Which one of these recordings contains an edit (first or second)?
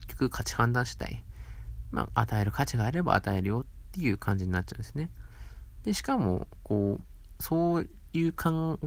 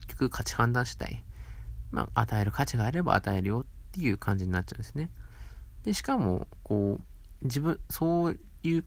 first